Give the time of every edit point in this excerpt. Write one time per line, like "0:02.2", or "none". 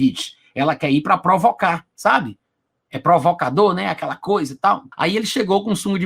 0:04.9